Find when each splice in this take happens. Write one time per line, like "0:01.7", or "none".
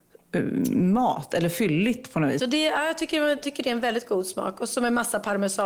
0:02.4